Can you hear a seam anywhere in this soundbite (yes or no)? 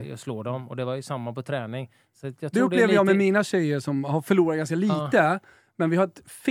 no